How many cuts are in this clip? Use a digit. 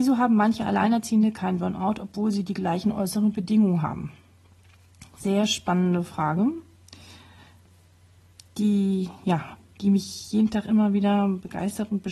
0